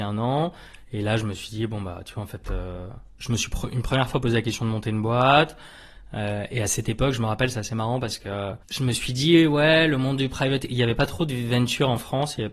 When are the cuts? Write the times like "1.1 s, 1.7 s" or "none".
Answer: 8.6 s